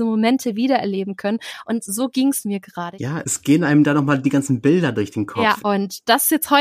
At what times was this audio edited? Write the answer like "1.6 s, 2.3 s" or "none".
3.2 s, 5.6 s